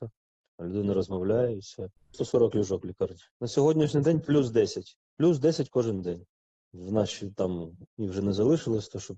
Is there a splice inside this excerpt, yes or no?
yes